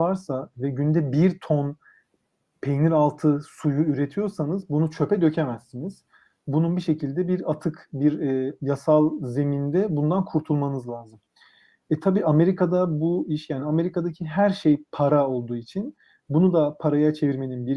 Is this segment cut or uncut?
uncut